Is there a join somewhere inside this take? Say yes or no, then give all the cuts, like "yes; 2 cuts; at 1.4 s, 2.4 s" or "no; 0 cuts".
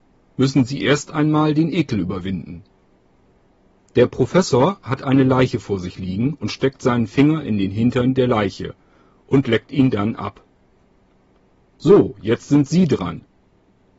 no; 0 cuts